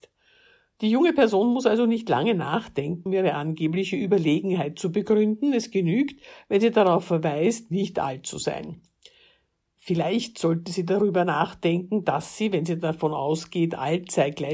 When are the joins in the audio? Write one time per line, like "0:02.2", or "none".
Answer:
0:03.1